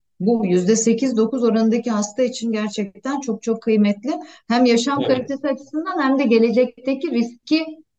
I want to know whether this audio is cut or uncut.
uncut